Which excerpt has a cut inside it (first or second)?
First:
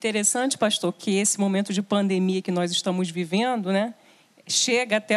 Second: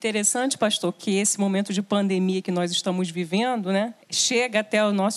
second